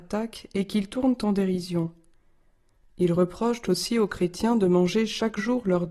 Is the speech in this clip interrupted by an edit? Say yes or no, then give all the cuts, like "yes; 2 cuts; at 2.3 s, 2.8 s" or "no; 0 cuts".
yes; 1 cut; at 2.9 s